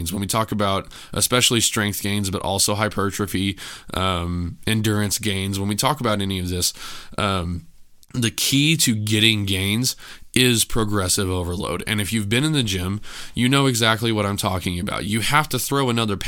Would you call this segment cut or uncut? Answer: cut